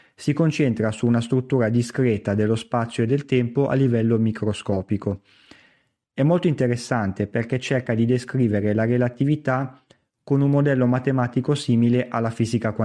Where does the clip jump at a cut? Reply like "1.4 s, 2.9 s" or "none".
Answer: none